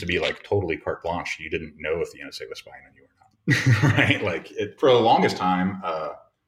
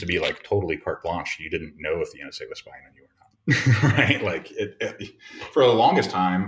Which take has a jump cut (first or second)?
first